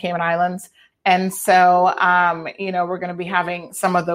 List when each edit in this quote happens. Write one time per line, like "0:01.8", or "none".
0:00.9